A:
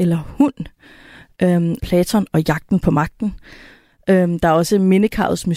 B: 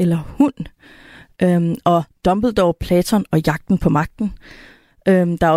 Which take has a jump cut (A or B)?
A